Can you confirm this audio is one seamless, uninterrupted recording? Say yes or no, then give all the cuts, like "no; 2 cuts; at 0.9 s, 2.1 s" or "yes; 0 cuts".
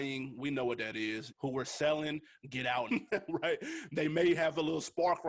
no; 2 cuts; at 1.3 s, 2.9 s